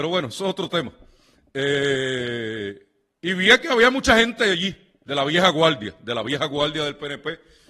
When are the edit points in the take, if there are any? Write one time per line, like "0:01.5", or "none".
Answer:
none